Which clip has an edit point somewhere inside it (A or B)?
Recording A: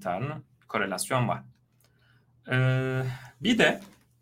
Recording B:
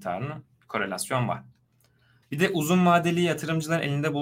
B